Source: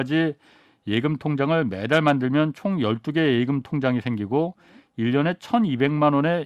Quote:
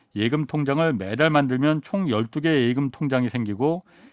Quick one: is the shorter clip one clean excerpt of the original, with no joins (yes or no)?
yes